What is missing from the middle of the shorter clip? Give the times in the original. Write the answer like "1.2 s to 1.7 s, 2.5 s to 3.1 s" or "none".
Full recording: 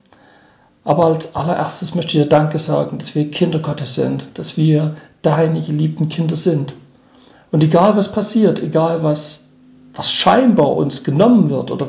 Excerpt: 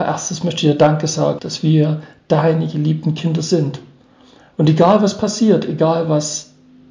2.9 s to 4.3 s